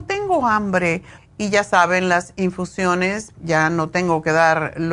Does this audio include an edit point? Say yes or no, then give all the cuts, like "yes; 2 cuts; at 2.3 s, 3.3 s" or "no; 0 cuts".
yes; 2 cuts; at 1.2 s, 3.3 s